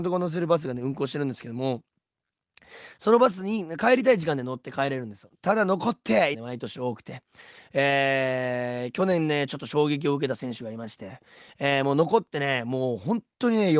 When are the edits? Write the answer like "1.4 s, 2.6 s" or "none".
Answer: 6.3 s